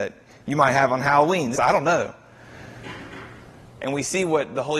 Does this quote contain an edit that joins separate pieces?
yes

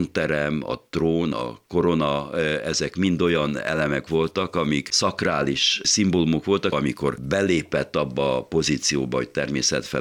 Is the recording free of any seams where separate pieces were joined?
no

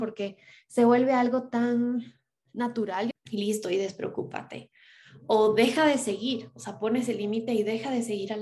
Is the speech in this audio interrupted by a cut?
yes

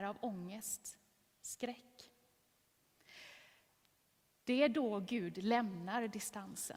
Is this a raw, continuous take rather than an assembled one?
yes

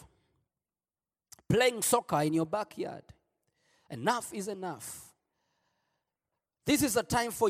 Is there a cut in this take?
no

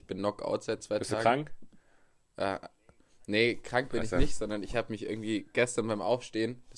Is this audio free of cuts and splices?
yes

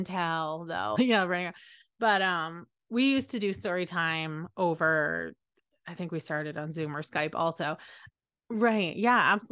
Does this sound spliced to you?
yes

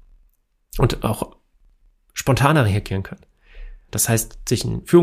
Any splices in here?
yes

